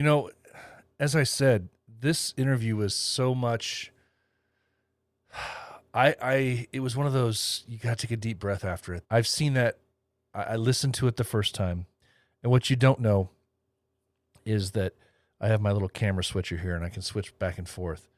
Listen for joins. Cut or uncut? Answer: cut